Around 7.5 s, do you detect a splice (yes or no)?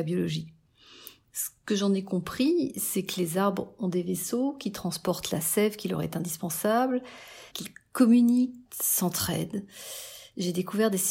yes